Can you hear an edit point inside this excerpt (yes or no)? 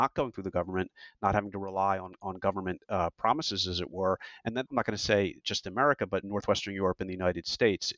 yes